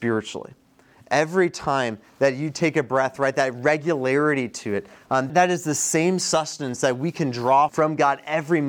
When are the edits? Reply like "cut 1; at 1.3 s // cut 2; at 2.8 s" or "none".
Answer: cut 1; at 5.3 s // cut 2; at 7.7 s